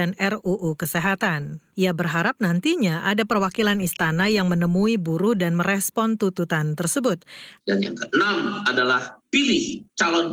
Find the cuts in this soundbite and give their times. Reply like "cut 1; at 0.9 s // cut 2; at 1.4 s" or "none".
cut 1; at 1.7 s // cut 2; at 7.6 s